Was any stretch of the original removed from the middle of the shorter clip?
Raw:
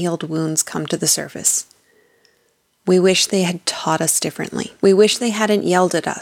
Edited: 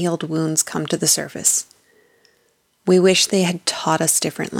no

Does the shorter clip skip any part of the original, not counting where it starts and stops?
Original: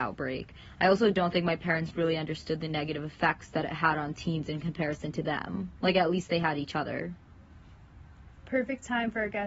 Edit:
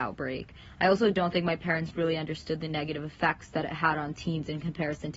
no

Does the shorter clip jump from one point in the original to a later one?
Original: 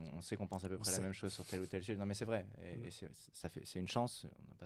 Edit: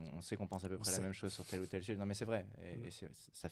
no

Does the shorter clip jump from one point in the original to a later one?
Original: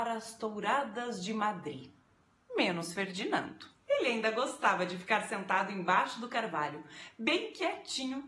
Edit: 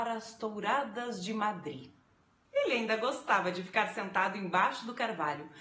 yes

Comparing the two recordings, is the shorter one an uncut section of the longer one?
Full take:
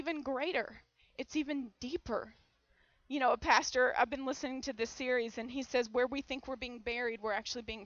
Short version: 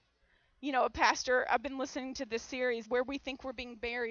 no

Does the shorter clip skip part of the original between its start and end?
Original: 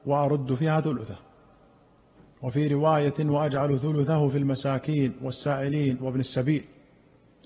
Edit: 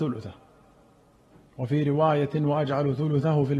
no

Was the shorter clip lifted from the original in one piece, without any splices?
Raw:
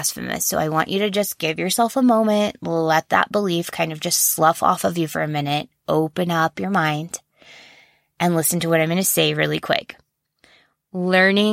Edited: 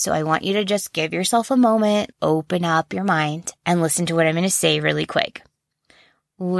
no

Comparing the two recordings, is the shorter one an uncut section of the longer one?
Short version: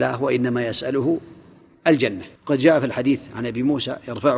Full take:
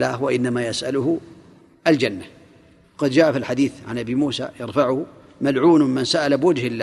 no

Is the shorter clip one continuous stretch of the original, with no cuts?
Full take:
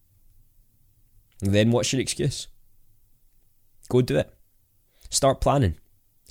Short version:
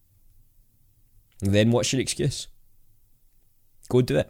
yes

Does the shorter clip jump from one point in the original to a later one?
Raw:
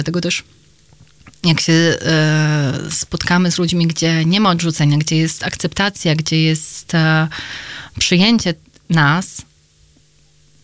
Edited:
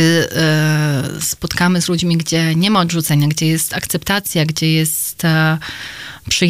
no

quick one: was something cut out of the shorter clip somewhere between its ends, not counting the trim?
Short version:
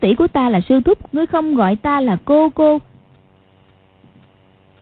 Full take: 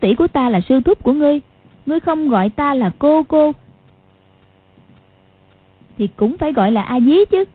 yes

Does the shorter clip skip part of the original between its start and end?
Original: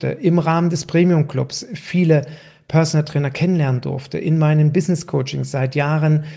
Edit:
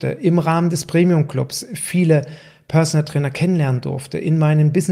no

